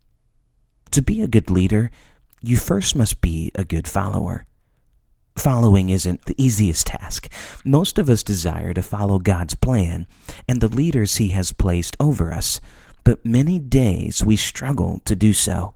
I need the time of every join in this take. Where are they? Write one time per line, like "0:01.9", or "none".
0:06.3